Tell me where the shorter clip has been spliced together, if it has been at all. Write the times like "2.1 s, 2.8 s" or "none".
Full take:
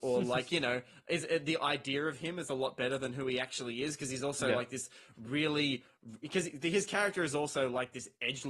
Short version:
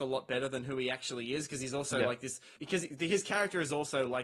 2.6 s

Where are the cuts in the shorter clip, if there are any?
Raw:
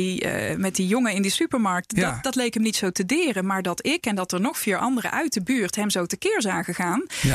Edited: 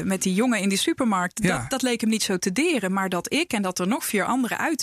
none

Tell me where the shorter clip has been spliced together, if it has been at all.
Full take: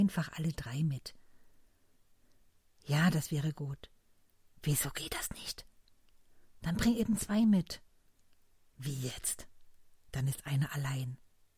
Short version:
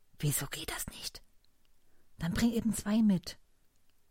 none

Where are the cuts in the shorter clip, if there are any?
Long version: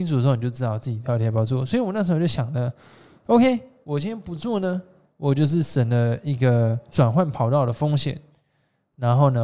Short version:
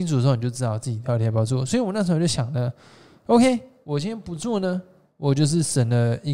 none

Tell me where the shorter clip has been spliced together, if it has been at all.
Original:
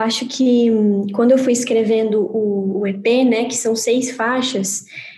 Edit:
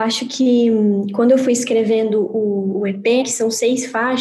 3.2 s

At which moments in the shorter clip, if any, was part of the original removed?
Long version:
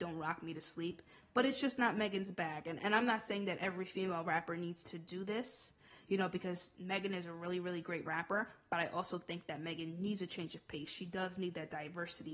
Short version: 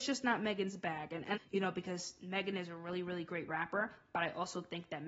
1.4 s

